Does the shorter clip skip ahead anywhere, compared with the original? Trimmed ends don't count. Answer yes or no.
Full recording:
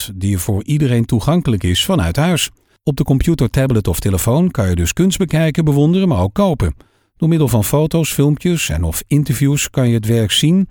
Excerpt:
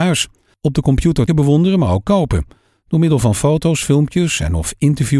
yes